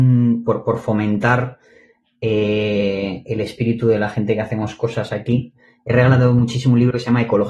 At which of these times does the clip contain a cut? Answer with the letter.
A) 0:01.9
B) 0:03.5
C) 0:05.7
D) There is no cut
D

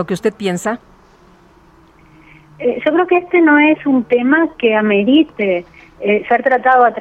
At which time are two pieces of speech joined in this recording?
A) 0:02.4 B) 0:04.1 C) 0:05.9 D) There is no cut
D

